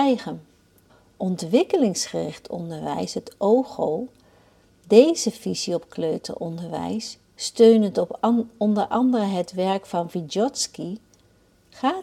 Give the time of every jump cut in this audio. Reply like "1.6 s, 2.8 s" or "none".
none